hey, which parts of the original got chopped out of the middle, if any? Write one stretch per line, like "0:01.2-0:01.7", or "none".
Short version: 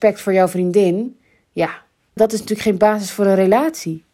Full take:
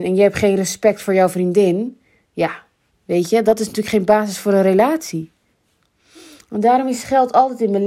0:03.0-0:03.4